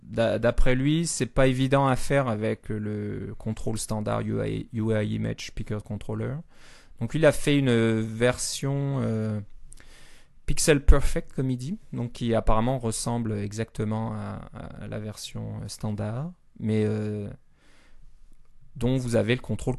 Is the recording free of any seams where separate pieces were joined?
yes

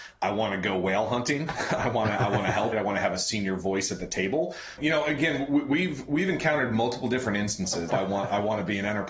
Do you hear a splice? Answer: yes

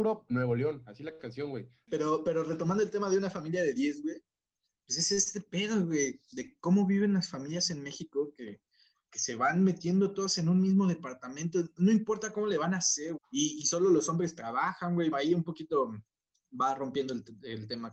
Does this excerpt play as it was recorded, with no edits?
no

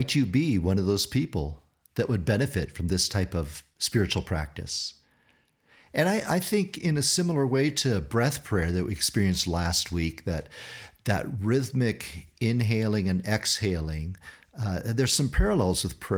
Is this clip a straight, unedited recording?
yes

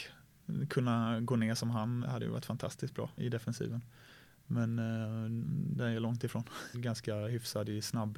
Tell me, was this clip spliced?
yes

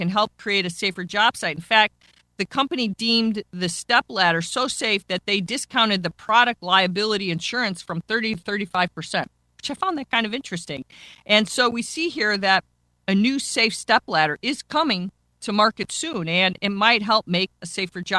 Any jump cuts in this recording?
no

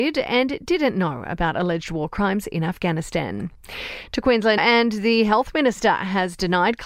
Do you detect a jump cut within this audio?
yes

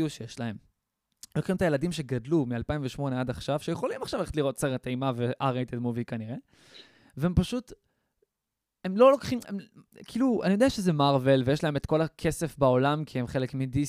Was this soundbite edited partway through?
yes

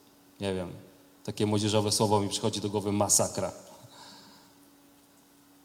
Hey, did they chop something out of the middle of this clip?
no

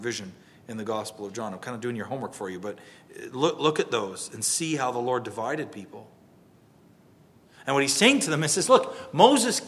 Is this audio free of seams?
yes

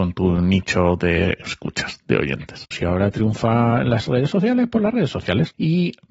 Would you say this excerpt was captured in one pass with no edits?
no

